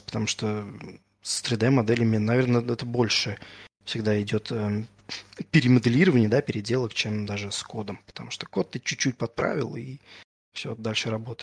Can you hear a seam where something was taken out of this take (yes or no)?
no